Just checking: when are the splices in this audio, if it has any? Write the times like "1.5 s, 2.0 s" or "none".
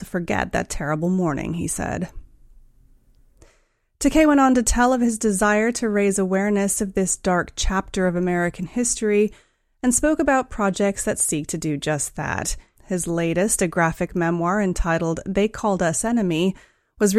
12.7 s